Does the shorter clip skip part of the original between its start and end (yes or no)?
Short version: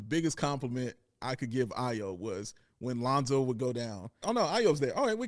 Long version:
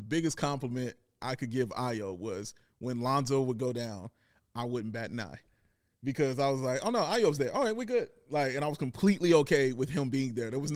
yes